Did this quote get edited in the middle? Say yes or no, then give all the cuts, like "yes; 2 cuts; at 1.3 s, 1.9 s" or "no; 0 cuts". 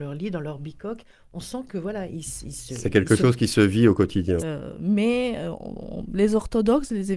yes; 1 cut; at 4.4 s